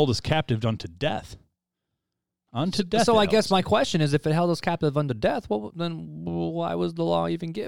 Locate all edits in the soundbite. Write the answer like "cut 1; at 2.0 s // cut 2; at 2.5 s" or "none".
none